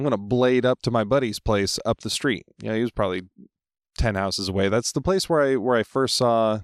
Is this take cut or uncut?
uncut